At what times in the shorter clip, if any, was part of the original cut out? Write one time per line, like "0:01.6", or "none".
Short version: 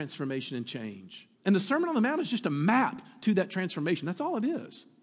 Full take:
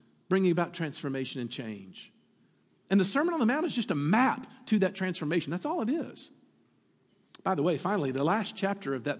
0:01.4